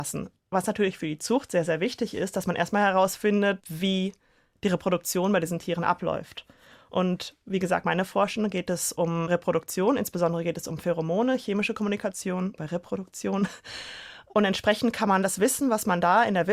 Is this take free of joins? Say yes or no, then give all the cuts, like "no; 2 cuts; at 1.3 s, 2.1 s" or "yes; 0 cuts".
yes; 0 cuts